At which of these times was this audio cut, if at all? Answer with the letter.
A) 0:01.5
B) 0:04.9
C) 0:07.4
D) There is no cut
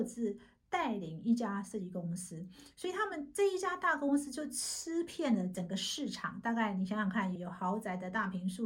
C